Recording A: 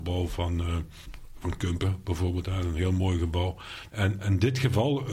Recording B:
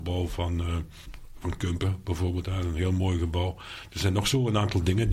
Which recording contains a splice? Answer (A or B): A